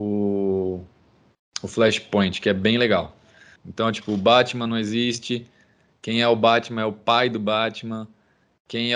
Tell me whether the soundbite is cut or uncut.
cut